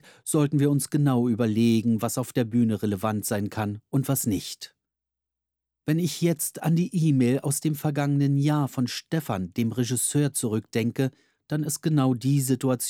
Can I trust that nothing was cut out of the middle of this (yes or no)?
yes